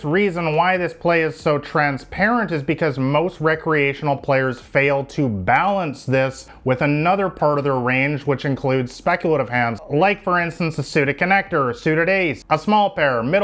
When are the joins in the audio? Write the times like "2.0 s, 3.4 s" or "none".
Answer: none